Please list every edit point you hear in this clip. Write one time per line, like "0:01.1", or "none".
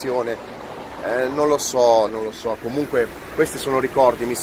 0:02.1